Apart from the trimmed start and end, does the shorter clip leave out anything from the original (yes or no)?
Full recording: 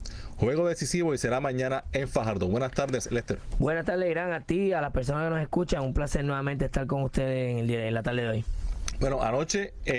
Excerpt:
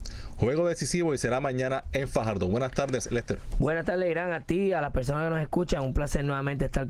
no